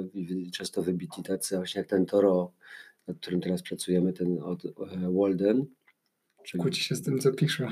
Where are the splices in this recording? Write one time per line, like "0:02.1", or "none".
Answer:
none